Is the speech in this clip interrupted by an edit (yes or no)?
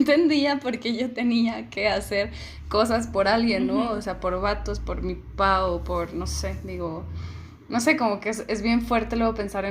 no